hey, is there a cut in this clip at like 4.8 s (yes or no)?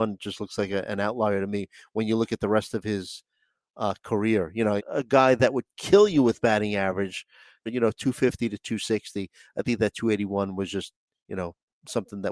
yes